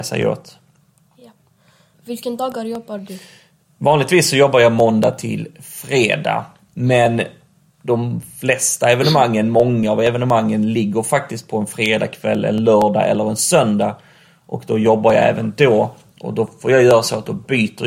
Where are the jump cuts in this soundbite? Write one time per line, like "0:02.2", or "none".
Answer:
0:01.9